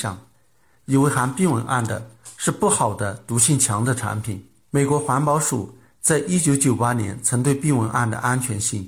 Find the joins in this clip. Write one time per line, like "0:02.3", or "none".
0:04.6